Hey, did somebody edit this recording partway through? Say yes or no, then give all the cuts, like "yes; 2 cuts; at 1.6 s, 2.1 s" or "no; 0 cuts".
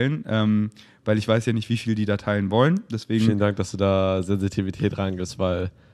no; 0 cuts